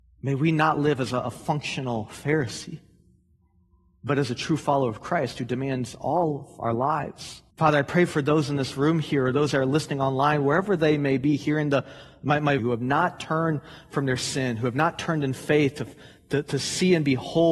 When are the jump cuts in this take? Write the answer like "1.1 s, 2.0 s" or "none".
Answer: 7.5 s, 12.6 s